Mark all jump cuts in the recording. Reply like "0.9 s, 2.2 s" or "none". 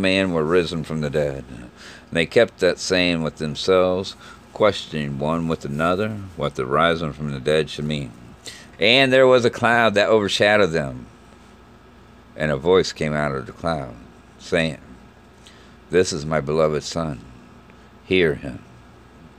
8.7 s